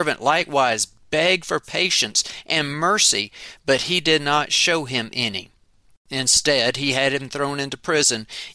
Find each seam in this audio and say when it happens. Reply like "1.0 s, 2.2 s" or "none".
none